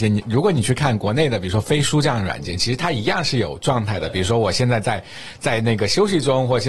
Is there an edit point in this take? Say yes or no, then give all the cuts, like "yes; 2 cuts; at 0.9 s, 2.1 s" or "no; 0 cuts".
no; 0 cuts